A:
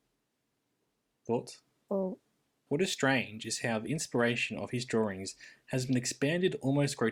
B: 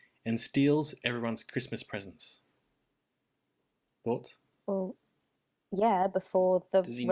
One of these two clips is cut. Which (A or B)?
A